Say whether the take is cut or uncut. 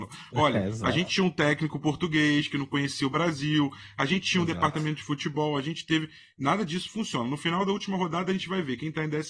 uncut